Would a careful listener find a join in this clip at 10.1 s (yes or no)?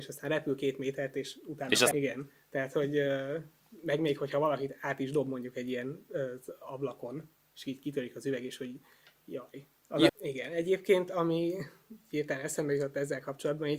yes